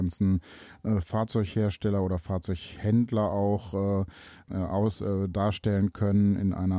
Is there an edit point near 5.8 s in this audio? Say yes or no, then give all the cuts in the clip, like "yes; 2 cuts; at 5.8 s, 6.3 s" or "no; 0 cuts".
no; 2 cuts; at 1.0 s, 4.5 s